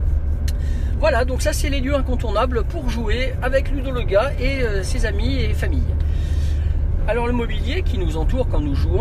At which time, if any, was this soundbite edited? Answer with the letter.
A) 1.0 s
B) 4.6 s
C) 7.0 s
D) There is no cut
C